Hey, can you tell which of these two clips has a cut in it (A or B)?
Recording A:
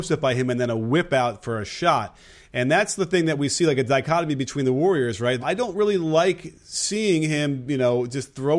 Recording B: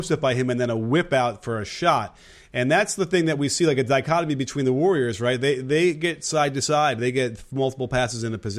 A